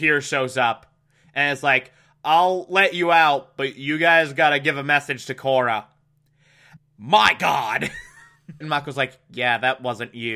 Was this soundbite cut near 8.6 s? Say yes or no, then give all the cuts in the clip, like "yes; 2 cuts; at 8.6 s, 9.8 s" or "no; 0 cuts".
yes; 2 cuts; at 6.8 s, 8.6 s